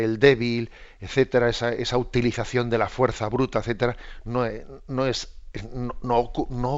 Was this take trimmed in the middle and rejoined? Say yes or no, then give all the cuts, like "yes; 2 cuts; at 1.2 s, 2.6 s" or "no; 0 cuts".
no; 0 cuts